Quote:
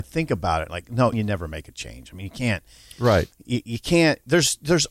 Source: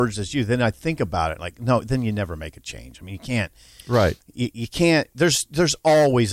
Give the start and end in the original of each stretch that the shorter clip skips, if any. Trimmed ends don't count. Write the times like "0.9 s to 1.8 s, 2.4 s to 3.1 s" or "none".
1.8 s to 2.0 s